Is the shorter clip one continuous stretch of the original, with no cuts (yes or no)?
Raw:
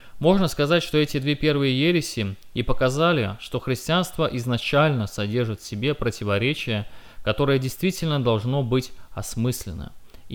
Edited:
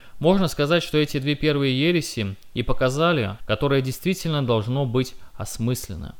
no